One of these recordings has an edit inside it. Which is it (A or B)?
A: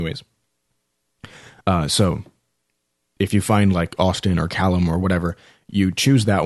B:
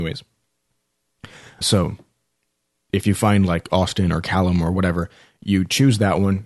B